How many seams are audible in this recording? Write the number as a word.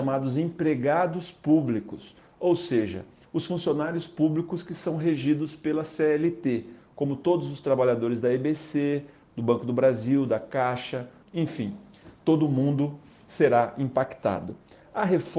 one